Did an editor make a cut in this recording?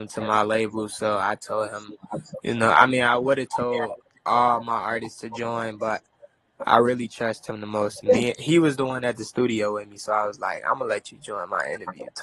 no; 0 cuts

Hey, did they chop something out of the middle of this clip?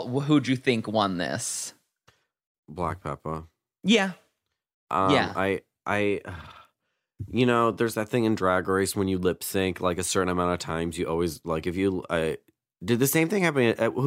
no; 0 cuts

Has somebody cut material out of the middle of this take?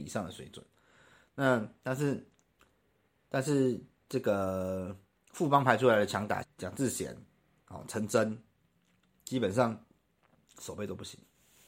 yes; 1 cut; at 6.4 s

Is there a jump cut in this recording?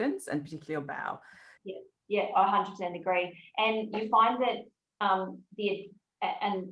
yes; 1 cut; at 1.6 s

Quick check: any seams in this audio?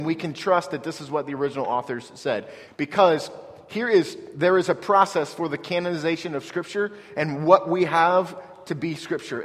yes; 1 cut; at 2.7 s

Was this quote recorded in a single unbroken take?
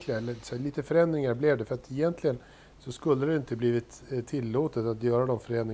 yes; 0 cuts

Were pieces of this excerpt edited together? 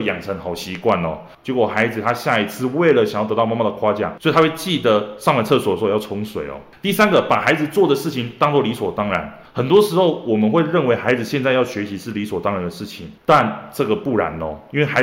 no; 0 cuts

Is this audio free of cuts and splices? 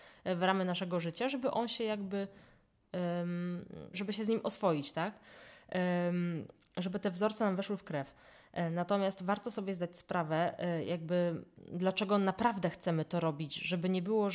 no; 1 cut; at 3.9 s

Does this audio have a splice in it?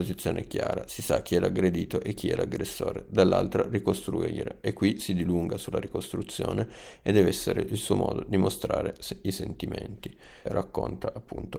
yes; 1 cut; at 10.4 s

